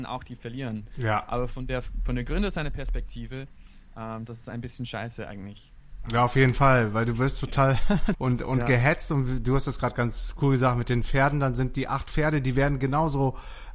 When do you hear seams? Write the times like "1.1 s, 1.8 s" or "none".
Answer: 8.1 s